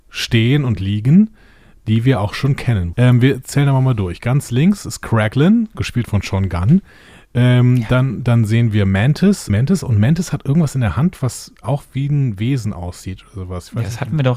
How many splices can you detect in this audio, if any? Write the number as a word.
two